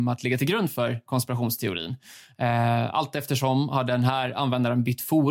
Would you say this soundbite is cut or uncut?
uncut